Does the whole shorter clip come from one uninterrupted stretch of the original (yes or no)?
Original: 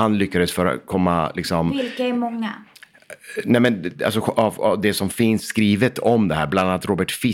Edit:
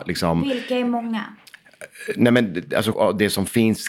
no